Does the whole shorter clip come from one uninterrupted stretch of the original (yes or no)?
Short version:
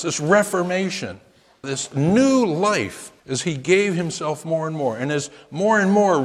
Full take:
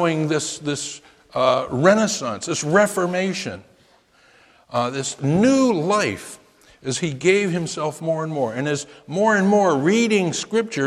no